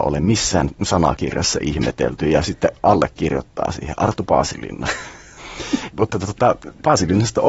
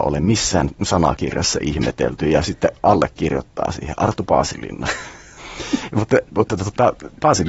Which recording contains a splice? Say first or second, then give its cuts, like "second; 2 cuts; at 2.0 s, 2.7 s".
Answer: first; 1 cut; at 5.9 s